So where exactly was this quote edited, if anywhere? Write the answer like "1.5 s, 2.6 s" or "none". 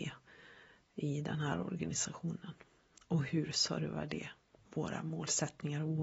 none

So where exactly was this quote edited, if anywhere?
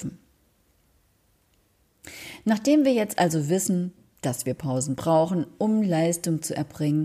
none

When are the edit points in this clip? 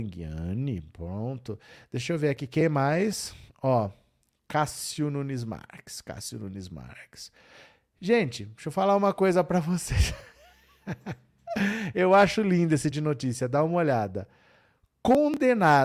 12.9 s

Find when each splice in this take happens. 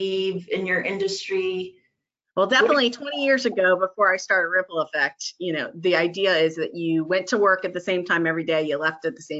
none

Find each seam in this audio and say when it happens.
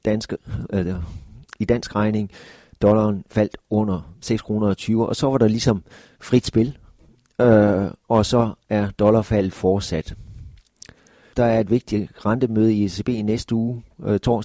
11.3 s

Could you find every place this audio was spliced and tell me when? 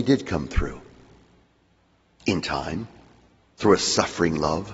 3.4 s

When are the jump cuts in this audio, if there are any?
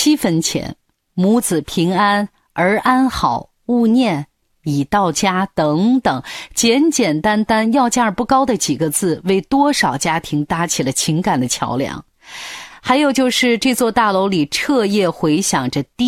none

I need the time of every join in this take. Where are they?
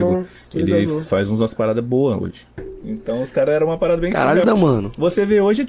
2.6 s, 4.4 s

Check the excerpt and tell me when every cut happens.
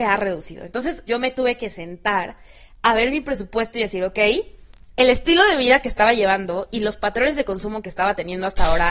1.1 s

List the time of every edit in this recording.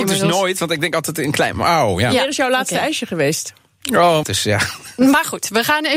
4.2 s

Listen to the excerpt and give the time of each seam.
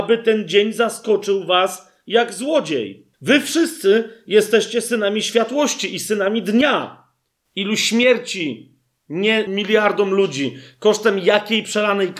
3.1 s, 7.5 s, 9.5 s

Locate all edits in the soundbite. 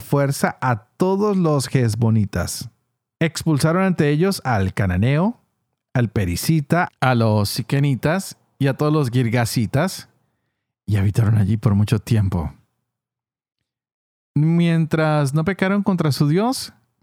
3.1 s, 6.9 s

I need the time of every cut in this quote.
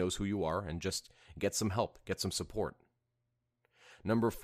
none

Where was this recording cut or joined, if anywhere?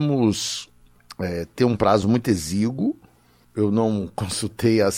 none

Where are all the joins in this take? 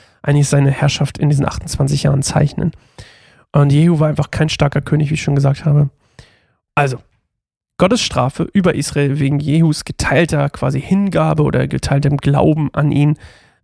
6.7 s

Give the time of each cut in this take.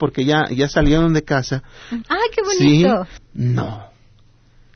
2.0 s, 3.2 s

